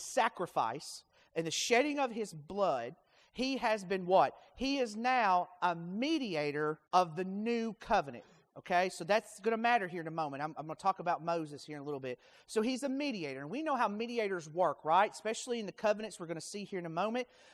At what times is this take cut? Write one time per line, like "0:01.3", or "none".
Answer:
0:06.9